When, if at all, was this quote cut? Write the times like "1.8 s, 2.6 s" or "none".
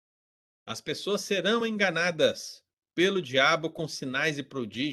none